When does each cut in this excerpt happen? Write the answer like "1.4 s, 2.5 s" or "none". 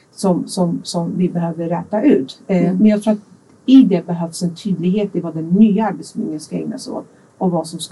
none